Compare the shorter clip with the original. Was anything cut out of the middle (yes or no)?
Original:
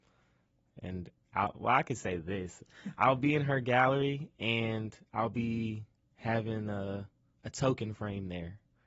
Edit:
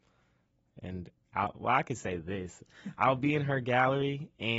no